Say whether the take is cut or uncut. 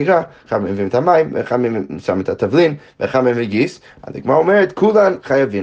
uncut